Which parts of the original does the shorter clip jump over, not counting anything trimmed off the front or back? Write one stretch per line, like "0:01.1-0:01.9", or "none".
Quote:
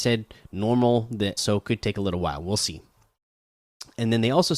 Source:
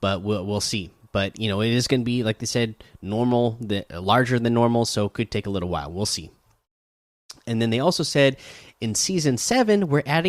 0:03.9-0:04.9